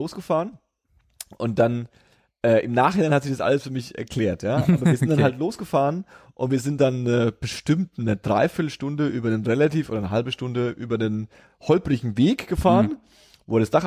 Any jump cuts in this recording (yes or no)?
no